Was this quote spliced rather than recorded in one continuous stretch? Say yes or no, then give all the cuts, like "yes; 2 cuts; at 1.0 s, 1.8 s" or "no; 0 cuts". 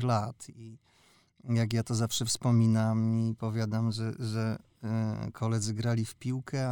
no; 0 cuts